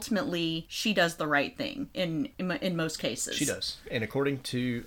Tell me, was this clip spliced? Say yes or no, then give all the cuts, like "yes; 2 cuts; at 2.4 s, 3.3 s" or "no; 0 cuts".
no; 0 cuts